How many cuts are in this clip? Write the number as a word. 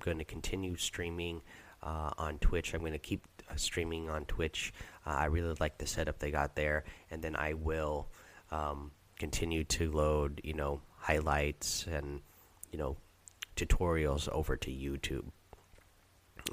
zero